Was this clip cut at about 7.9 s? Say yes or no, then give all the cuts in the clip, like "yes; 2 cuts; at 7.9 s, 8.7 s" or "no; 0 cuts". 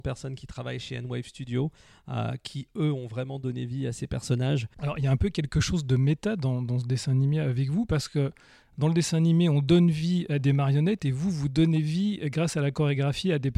no; 1 cut; at 4.7 s